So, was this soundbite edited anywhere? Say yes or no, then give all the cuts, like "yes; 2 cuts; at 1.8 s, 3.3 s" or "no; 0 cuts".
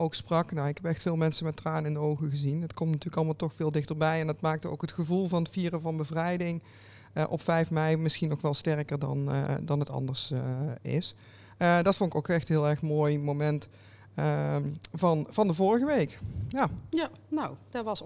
no; 0 cuts